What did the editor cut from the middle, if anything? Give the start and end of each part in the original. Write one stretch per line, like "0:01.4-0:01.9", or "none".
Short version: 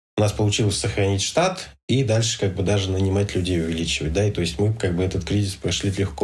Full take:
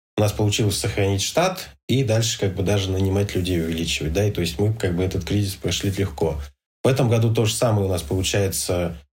none